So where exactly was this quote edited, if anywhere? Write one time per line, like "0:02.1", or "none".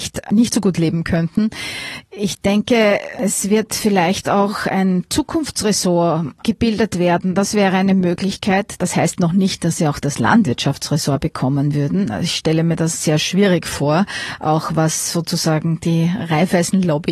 0:08.8